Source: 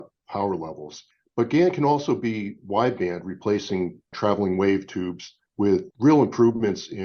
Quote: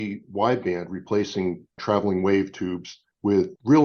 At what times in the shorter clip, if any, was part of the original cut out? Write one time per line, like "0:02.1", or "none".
none